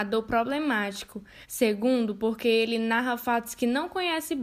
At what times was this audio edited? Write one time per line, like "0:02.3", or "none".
0:01.4